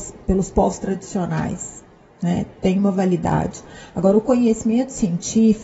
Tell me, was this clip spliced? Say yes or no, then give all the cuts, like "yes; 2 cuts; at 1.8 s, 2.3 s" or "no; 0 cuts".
no; 0 cuts